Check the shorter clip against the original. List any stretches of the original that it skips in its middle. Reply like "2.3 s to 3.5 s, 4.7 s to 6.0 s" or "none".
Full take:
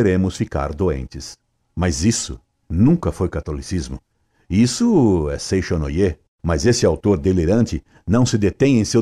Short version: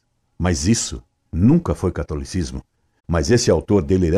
4.4 s to 6.3 s